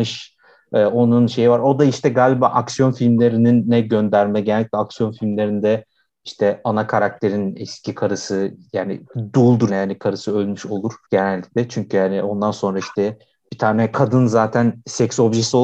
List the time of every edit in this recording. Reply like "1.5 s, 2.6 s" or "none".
9.7 s, 11.0 s